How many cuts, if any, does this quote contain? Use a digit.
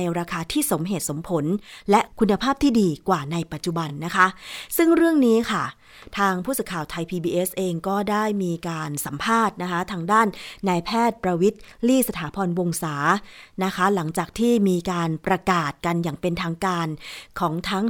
0